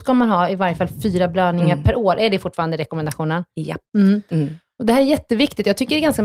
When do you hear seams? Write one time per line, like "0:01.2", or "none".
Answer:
none